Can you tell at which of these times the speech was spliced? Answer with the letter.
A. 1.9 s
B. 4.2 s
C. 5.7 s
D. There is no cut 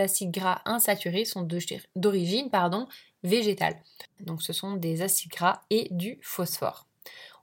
B